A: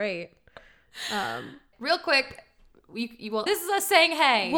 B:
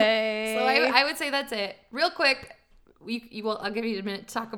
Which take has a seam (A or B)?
A